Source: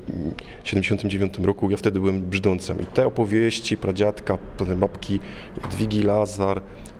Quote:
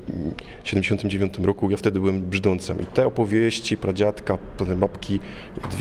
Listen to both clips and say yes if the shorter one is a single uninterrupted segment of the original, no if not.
yes